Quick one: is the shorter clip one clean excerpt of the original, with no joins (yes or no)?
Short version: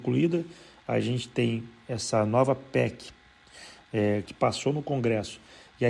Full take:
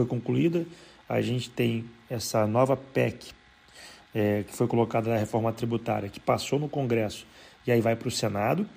no